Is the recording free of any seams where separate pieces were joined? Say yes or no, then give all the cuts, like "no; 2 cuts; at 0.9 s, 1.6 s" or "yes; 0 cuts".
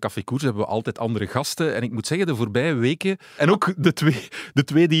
no; 1 cut; at 3.4 s